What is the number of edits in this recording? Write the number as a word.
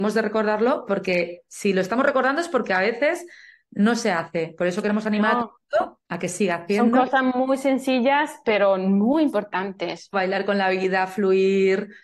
two